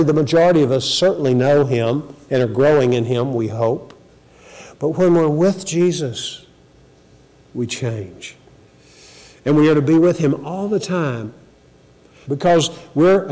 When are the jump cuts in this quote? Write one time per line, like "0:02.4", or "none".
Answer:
0:12.3